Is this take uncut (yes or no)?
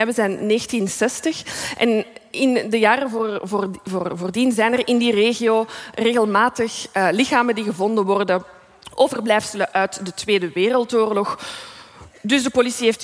yes